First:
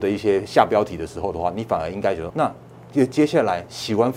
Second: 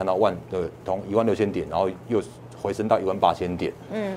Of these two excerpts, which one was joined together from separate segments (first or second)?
first